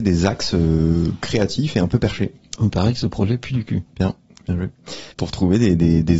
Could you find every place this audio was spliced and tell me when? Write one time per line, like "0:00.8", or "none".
0:05.1